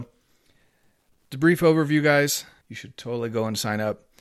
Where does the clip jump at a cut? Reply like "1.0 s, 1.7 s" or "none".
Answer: 2.6 s